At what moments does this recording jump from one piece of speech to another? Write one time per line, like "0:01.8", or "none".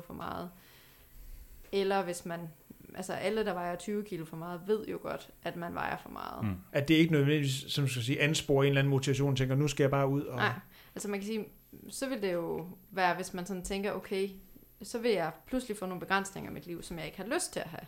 0:06.7